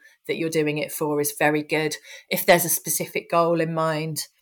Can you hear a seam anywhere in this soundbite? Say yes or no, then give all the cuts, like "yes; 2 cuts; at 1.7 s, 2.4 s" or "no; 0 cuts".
no; 0 cuts